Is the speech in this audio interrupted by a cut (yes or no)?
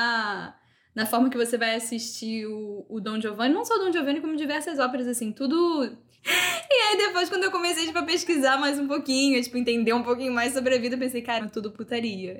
yes